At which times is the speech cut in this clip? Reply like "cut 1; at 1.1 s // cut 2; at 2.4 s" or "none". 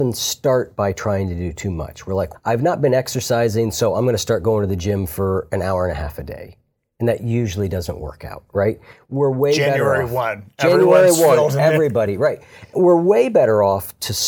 cut 1; at 2.3 s

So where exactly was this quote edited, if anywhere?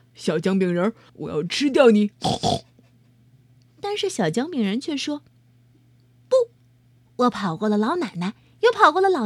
cut 1; at 1.1 s

